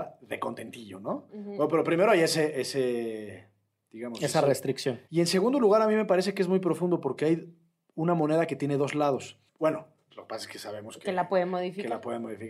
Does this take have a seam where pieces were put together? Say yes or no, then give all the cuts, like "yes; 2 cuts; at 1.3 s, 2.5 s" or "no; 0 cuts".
yes; 2 cuts; at 5.1 s, 9.5 s